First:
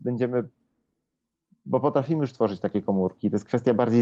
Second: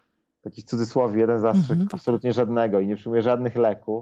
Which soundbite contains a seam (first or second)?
second